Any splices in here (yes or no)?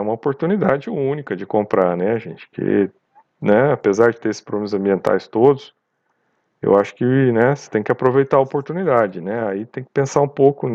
no